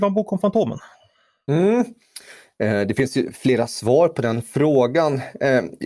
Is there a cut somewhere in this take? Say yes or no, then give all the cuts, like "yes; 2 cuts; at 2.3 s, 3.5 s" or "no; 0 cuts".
no; 0 cuts